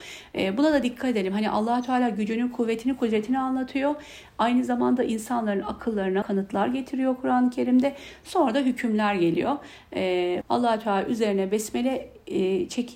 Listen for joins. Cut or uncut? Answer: cut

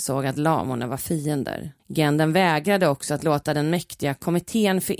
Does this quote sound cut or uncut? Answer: cut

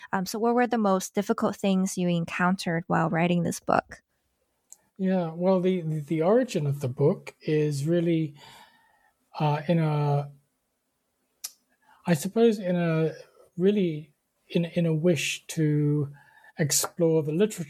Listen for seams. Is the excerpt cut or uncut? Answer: uncut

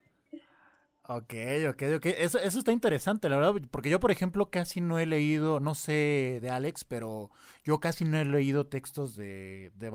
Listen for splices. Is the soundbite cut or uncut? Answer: uncut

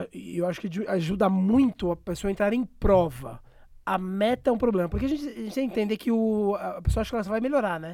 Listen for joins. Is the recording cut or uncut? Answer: uncut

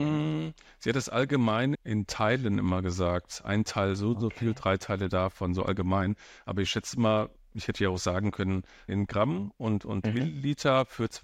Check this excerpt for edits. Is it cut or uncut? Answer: cut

